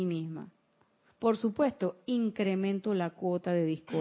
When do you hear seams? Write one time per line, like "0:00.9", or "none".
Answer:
0:01.1